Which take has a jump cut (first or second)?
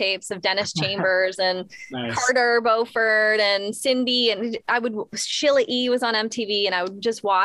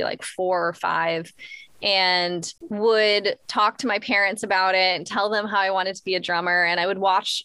second